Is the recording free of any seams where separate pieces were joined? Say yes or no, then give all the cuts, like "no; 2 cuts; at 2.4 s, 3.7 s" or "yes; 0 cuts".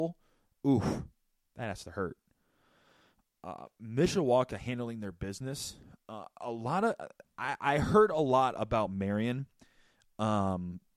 yes; 0 cuts